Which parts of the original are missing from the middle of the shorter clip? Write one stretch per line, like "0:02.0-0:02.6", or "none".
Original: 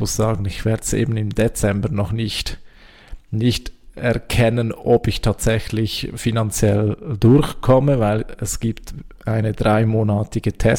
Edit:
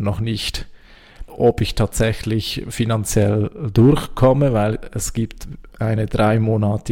0:03.2-0:04.7